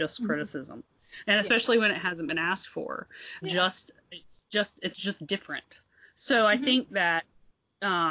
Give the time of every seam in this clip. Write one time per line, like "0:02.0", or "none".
0:03.4